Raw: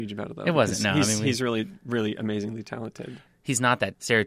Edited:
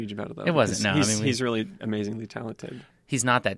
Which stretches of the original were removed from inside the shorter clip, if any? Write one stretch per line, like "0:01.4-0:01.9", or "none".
0:01.8-0:02.2